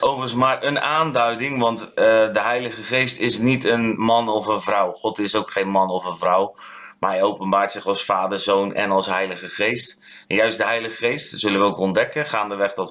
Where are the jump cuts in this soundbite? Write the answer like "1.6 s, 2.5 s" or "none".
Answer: none